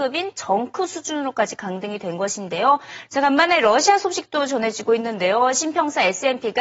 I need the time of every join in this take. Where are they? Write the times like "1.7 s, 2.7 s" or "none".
3.1 s